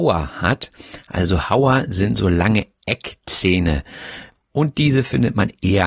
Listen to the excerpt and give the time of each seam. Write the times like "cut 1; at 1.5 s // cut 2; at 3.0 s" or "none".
none